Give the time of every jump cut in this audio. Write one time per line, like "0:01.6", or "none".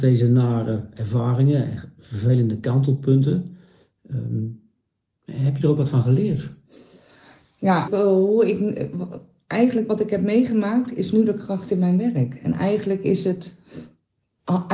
0:07.9